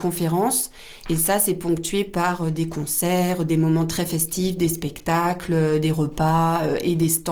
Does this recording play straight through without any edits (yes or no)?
yes